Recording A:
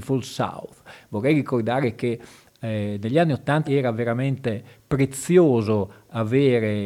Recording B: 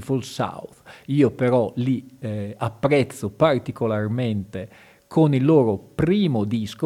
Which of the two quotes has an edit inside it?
A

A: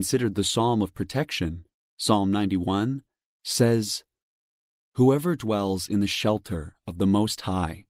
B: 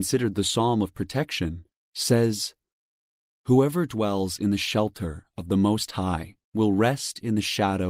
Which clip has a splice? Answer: B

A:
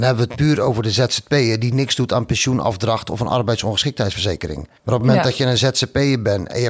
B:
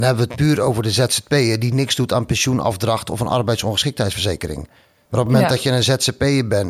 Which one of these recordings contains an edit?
A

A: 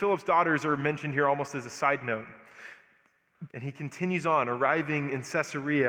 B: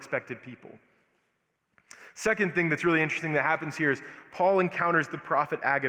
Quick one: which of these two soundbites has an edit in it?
A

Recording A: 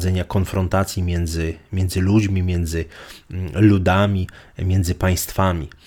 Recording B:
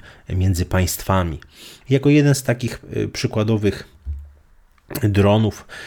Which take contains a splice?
B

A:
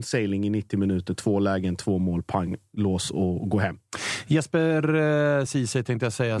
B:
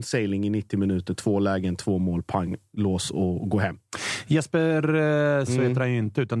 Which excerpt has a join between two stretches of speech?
B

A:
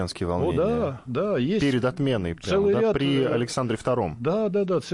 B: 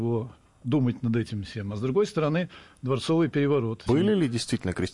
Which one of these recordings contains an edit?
B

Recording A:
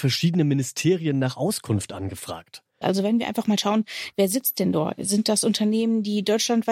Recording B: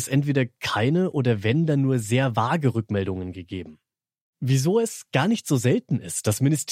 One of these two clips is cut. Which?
A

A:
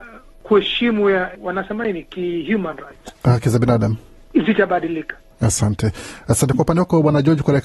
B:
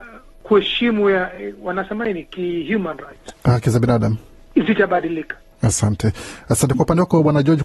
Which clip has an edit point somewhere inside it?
A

